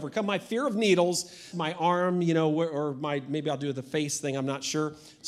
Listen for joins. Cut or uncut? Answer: cut